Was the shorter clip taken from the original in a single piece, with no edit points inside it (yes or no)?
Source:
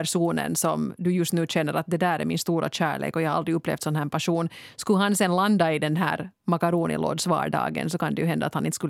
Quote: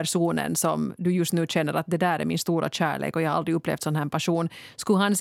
yes